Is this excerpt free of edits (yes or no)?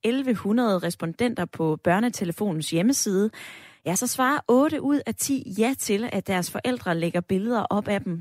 yes